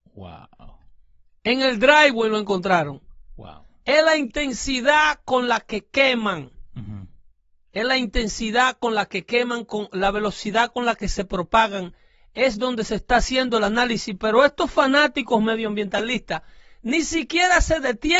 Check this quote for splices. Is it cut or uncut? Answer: uncut